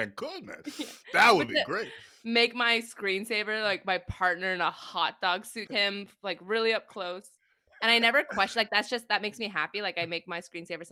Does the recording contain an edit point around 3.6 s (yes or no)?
no